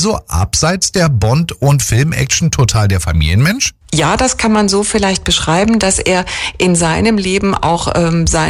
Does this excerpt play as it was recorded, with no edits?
yes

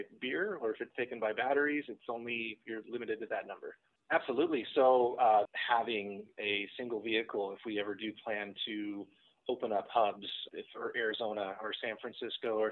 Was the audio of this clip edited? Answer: yes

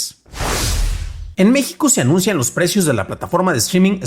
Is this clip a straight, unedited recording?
no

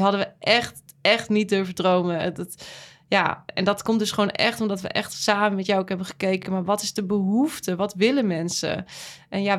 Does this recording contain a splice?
no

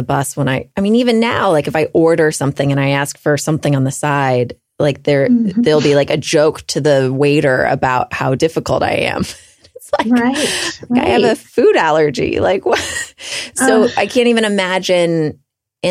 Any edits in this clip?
no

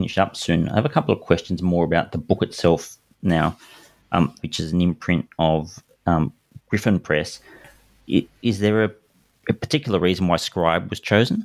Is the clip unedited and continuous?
no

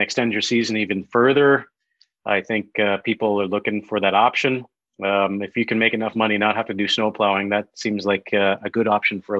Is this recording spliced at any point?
no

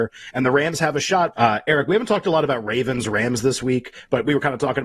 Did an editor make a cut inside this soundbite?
yes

